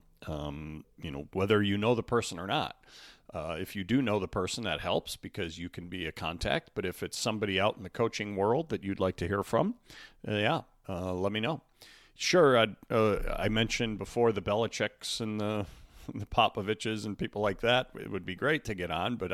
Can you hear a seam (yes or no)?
no